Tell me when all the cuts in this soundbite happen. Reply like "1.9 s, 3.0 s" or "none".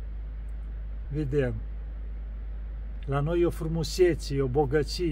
1.0 s, 3.0 s